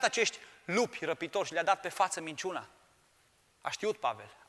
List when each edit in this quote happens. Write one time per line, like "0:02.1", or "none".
0:03.5